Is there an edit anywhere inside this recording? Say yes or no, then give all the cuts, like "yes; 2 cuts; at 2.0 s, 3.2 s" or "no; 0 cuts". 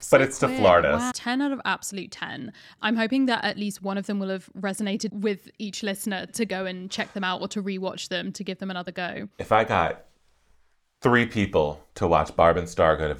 yes; 2 cuts; at 1.1 s, 6.3 s